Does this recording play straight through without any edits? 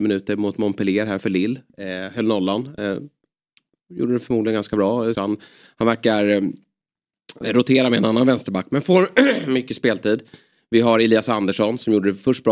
no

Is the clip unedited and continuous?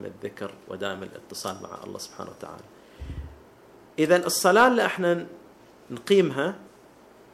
yes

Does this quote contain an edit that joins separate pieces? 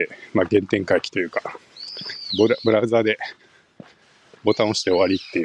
yes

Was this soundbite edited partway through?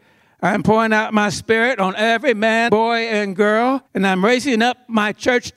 yes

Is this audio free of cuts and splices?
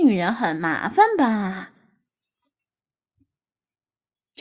yes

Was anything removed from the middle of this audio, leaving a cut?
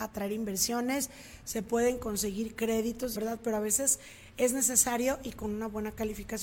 yes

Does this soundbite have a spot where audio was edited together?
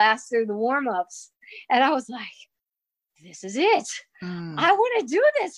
no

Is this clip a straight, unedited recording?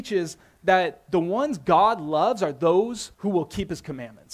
no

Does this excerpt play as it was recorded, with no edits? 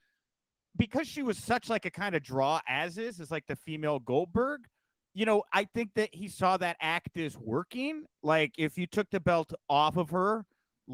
yes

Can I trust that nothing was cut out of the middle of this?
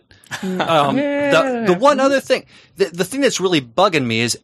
yes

